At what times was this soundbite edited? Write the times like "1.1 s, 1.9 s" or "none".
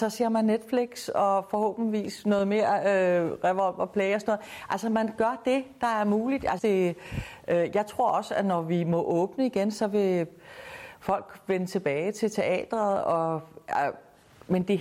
6.6 s